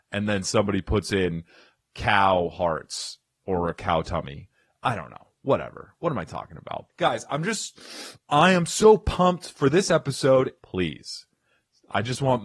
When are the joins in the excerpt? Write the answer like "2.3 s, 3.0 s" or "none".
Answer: 8.1 s, 10.6 s